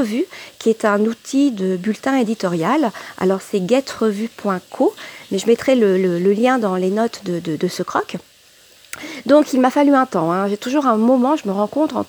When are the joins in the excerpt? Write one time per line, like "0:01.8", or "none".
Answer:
none